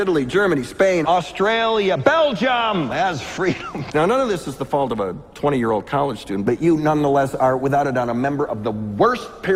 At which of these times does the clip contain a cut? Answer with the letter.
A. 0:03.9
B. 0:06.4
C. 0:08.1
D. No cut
A